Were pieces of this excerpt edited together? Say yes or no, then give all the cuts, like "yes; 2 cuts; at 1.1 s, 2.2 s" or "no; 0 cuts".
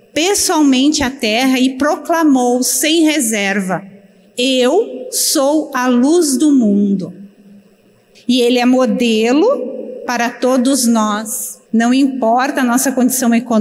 yes; 2 cuts; at 8.1 s, 11.7 s